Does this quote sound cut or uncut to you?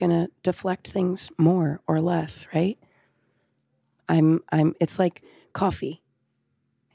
uncut